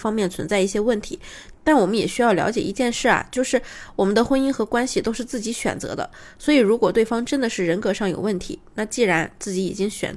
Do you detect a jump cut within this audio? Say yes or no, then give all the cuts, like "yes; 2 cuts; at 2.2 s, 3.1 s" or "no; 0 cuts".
no; 0 cuts